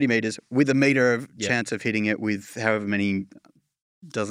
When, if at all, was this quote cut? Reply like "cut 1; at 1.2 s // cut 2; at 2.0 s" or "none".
none

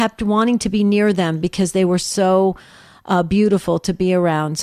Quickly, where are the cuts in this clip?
none

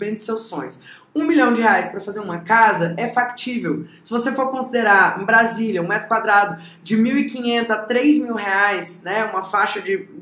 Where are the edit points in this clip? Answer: none

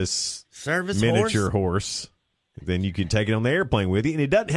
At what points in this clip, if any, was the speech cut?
none

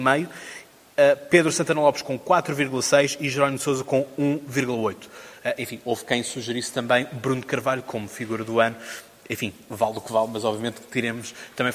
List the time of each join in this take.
none

